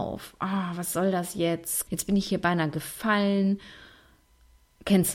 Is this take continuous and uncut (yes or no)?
no